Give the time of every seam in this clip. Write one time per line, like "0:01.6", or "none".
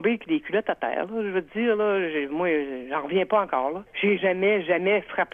0:04.2